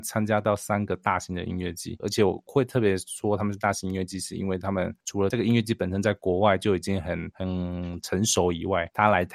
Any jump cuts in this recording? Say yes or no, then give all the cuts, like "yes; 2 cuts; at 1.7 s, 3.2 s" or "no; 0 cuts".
yes; 1 cut; at 2.0 s